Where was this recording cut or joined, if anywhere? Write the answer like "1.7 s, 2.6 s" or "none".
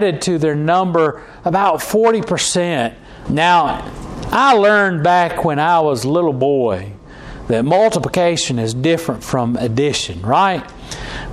3.3 s